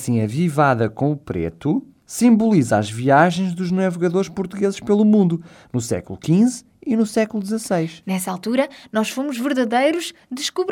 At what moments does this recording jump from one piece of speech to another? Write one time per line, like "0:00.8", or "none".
none

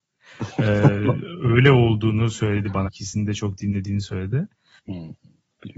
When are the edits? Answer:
0:02.9
0:04.8

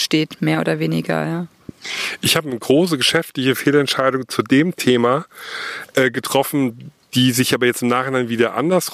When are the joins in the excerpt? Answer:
none

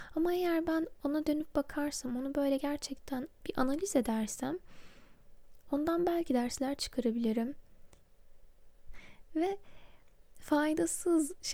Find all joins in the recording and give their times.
0:08.9

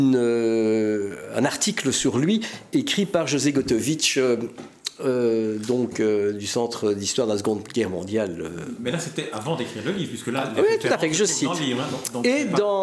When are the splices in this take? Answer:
none

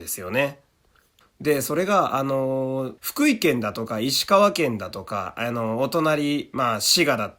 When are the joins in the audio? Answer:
0:01.2
0:03.0

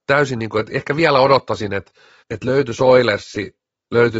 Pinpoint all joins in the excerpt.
0:02.2

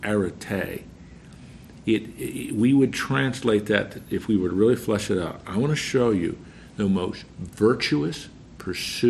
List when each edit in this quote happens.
none

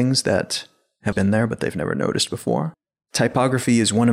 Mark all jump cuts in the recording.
0:01.1

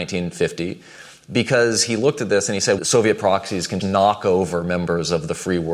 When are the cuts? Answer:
0:02.8
0:03.8

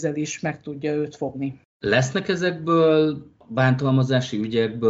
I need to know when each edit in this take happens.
none

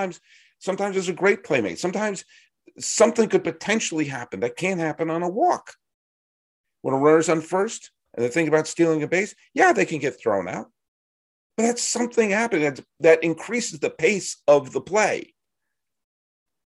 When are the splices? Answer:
none

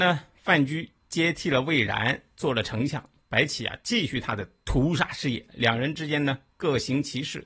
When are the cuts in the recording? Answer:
none

